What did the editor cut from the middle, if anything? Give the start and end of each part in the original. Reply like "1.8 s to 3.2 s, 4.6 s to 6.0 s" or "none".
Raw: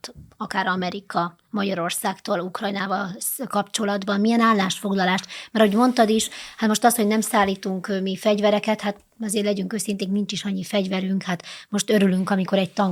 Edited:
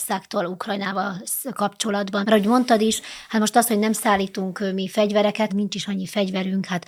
4.2 s to 5.5 s, 8.8 s to 10.1 s